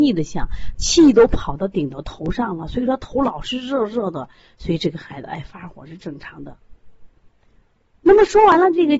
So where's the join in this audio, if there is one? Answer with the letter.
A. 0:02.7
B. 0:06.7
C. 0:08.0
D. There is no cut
C